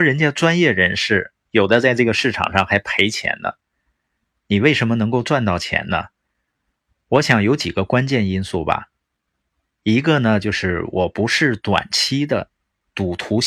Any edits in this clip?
no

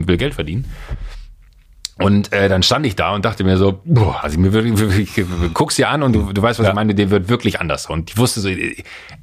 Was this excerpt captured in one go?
yes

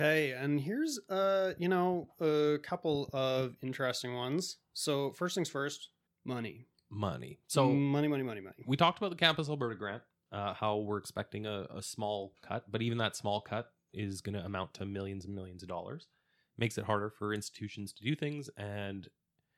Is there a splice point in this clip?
no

